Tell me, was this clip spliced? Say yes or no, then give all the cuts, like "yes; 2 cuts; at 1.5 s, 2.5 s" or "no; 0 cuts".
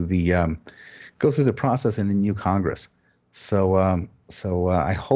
no; 0 cuts